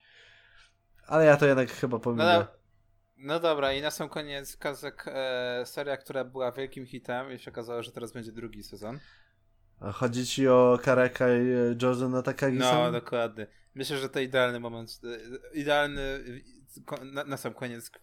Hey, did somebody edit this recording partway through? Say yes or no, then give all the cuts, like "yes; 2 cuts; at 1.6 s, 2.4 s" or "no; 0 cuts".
no; 0 cuts